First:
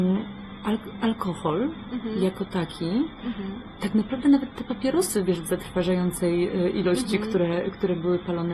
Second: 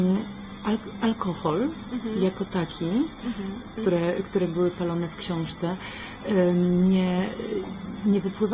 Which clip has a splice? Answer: second; 1 cut; at 3.8 s

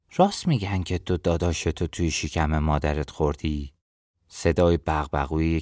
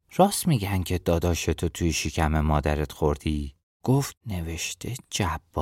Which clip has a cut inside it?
second; 2 cuts; at 1.0 s, 3.8 s

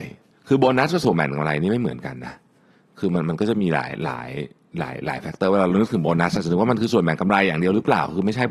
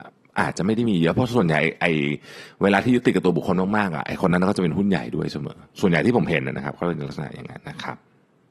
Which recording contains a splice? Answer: second; 1 cut; at 7.6 s

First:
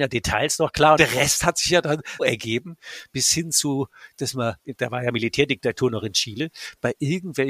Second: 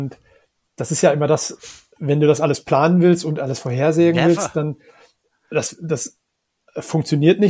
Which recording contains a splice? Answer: first; 2 cuts; at 1.0 s, 2.2 s

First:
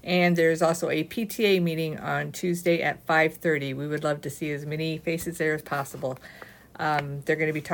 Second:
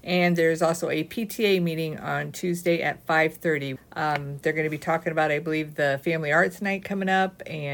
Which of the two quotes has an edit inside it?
second; 1 cut; at 3.8 s

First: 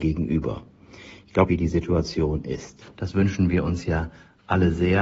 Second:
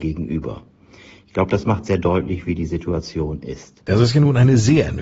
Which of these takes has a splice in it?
first; 2 cuts; at 1.5 s, 2.8 s

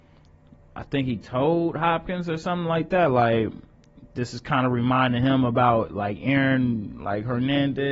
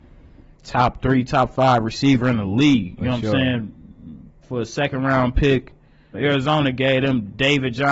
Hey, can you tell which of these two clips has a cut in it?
second; 2 cuts; at 4.4 s, 6.1 s

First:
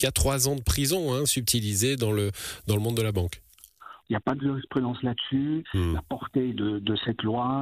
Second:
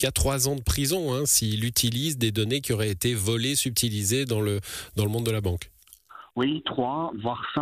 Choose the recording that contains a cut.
first; 3 cuts; at 1.3 s, 4.0 s, 5.6 s

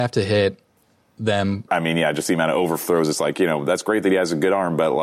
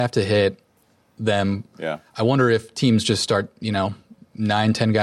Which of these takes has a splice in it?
first; 1 cut; at 1.7 s

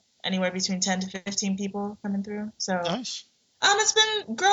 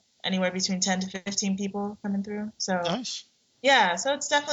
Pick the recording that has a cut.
first; 1 cut; at 3.5 s

